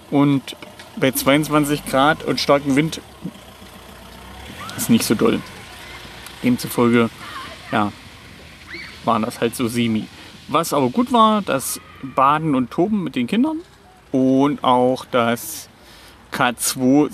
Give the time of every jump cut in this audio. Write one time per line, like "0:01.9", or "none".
none